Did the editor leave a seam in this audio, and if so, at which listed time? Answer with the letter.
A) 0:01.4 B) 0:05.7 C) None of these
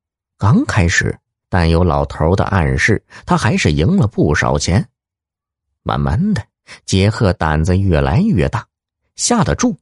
A